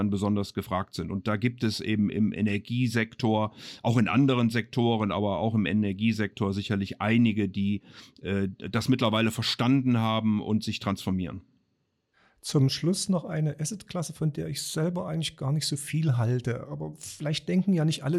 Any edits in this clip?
no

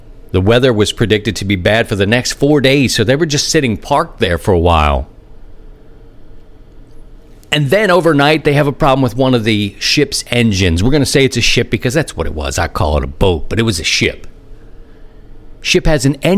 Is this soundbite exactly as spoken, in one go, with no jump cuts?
yes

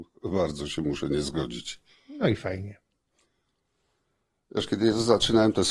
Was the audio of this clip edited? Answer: no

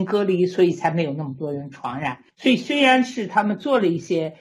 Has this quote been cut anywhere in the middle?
yes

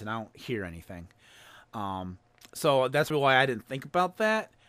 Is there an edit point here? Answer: yes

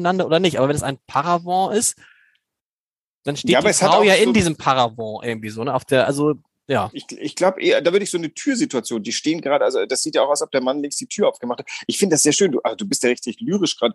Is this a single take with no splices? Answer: yes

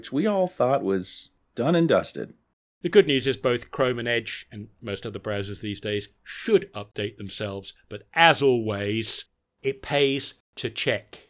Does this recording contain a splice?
yes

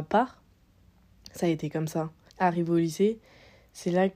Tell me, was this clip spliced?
yes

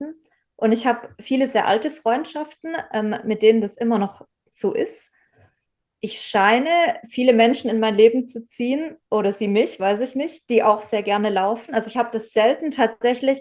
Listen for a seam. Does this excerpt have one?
no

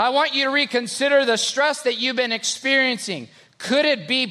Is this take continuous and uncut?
yes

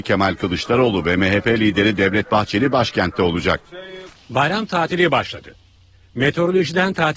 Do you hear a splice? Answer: yes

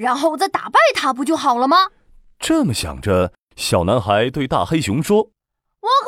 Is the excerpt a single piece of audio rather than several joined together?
yes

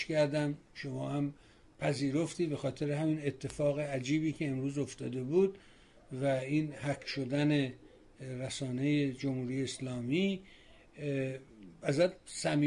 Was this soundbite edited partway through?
no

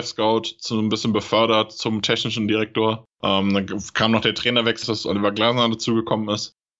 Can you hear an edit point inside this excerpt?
yes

